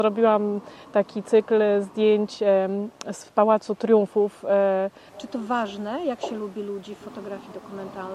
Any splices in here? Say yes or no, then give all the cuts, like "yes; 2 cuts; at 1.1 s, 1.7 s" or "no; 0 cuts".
yes; 1 cut; at 5.1 s